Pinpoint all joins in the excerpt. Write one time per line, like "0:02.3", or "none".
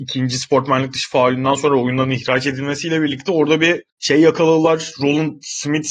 0:03.9